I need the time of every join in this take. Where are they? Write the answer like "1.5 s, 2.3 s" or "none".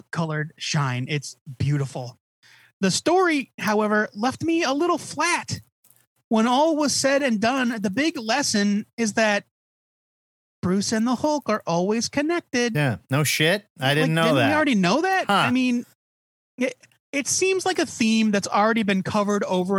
none